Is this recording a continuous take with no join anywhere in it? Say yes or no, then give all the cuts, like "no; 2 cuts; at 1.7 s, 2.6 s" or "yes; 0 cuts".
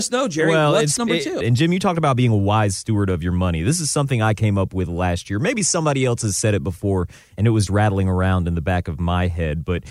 no; 2 cuts; at 1.4 s, 7.7 s